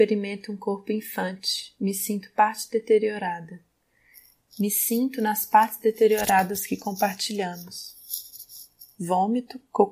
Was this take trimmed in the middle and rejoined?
no; 0 cuts

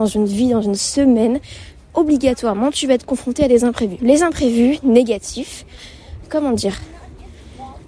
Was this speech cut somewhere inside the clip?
yes; 2 cuts; at 4.0 s, 6.2 s

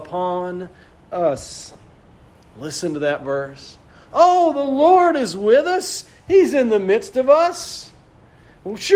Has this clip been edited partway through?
no; 0 cuts

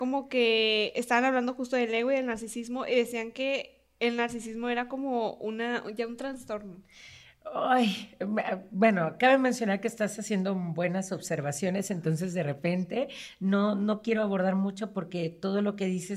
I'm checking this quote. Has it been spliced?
no; 0 cuts

